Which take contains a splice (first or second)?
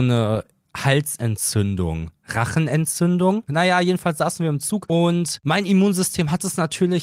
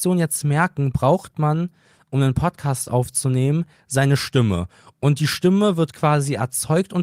first